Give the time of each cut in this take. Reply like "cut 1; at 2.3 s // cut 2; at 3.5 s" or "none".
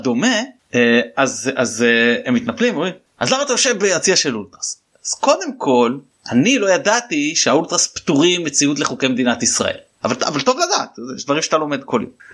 none